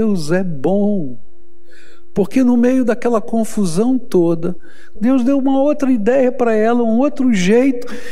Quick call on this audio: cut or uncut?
cut